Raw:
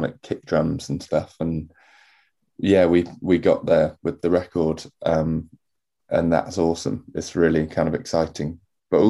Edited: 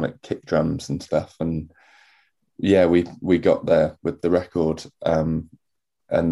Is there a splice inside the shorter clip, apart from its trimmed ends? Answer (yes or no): no